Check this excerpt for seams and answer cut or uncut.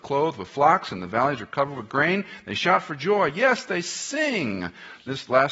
uncut